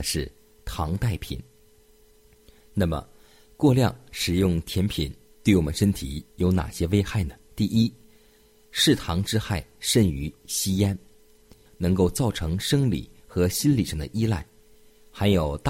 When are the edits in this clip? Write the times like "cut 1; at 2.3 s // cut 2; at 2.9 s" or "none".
cut 1; at 7.5 s // cut 2; at 11.7 s